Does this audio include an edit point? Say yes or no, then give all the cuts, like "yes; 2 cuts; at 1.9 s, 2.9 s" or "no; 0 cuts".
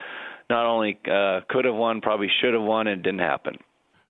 no; 0 cuts